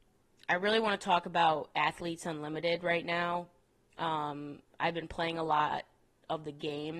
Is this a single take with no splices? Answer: yes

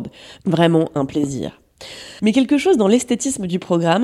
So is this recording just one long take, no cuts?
no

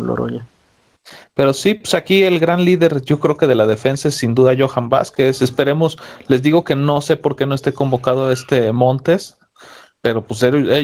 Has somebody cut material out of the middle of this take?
no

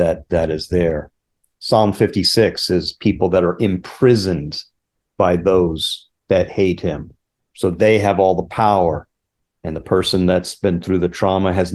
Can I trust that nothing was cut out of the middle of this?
yes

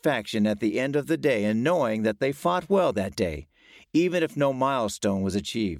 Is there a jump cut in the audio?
no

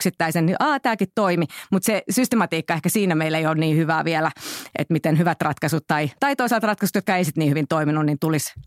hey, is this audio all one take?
yes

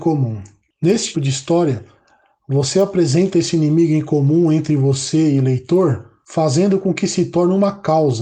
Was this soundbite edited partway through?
yes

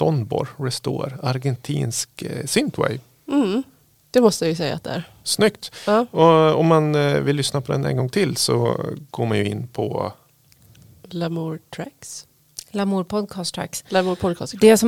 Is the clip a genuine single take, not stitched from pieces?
yes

